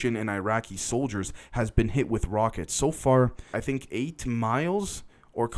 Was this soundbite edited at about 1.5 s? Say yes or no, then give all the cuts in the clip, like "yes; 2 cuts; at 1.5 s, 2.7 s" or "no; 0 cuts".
no; 1 cut; at 3.5 s